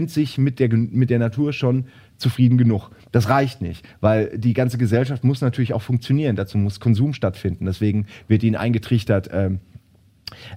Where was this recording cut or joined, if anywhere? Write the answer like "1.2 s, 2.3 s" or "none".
none